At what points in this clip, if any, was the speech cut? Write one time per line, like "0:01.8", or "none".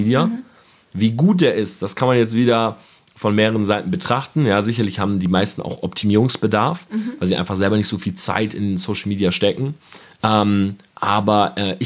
none